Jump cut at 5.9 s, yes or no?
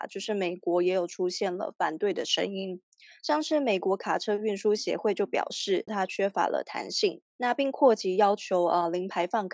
yes